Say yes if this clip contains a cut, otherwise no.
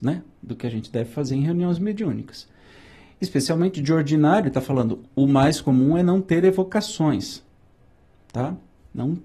yes